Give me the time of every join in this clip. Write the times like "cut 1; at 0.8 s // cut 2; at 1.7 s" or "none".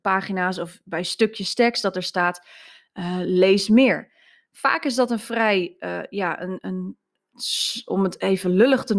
cut 1; at 6.6 s